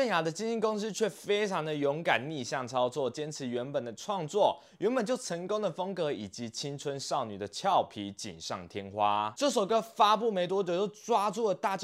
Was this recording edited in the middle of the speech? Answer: no; 0 cuts

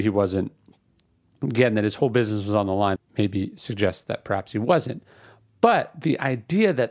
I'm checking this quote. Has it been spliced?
yes; 1 cut; at 3.0 s

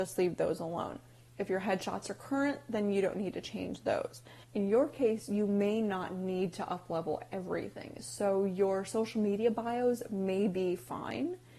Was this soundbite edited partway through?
yes; 1 cut; at 4.4 s

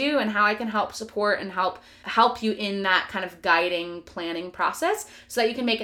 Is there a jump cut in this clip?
no; 0 cuts

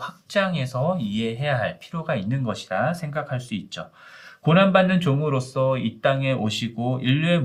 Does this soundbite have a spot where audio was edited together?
no; 0 cuts

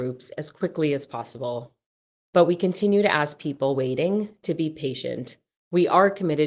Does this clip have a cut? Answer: yes; 1 cut; at 2.2 s

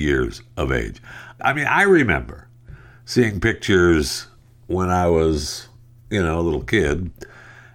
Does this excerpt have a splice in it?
yes; 1 cut; at 1.4 s

